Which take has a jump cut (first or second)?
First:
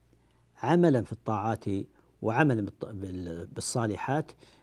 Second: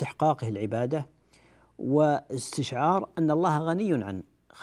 first